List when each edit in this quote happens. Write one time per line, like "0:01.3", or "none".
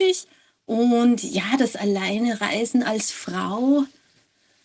none